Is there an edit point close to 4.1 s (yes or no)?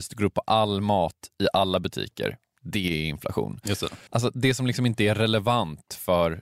yes